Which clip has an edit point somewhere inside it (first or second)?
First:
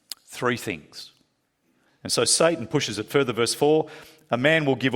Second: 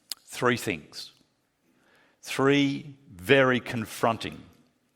first